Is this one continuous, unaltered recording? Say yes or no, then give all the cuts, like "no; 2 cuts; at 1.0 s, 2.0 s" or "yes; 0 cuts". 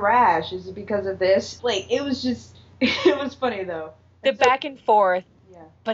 no; 1 cut; at 1.6 s